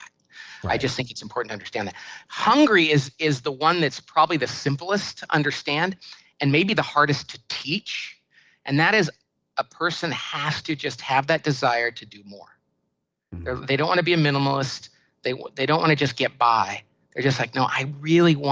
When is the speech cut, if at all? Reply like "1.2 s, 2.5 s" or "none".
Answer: none

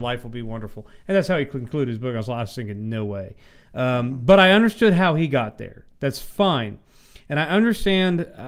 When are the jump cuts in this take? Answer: none

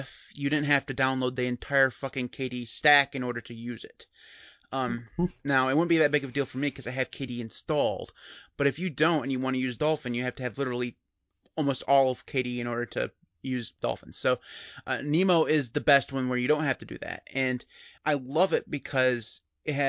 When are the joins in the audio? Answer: 13.3 s, 18.0 s

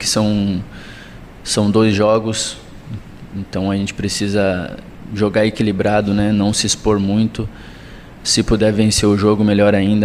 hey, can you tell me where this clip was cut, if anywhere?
8.2 s

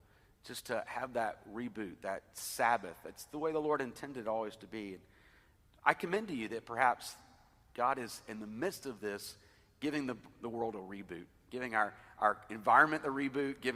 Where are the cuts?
none

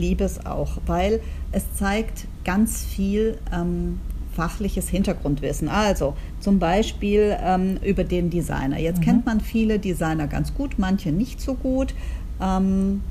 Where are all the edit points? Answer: none

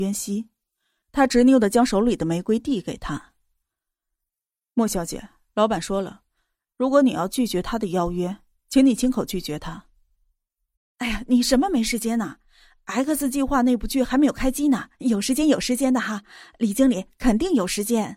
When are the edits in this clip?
10.8 s

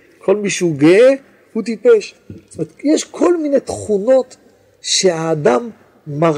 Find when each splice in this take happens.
none

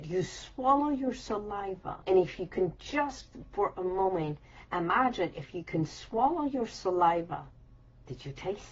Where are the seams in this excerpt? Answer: 2.0 s

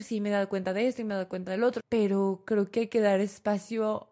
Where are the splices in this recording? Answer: 1.8 s

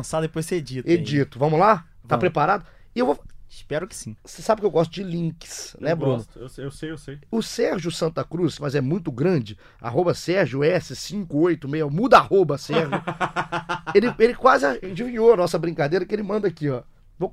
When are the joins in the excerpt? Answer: 8.6 s

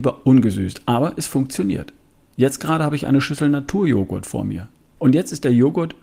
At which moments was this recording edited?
5.0 s

